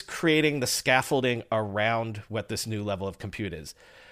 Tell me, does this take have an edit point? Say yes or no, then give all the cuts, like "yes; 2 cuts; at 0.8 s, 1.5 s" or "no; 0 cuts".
no; 0 cuts